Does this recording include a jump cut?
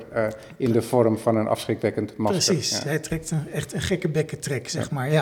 no; 0 cuts

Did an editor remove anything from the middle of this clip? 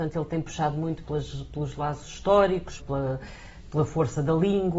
yes; 1 cut; at 2.8 s

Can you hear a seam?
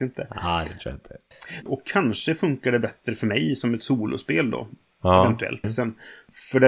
yes; 2 cuts; at 1.6 s, 5.6 s

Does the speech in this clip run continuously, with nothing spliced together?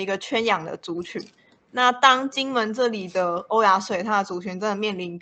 yes; 0 cuts

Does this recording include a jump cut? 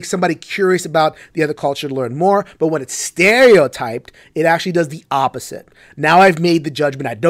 no; 0 cuts

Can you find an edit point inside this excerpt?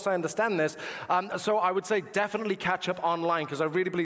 no; 0 cuts

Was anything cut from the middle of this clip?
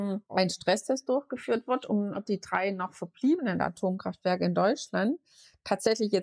yes; 1 cut; at 2.1 s

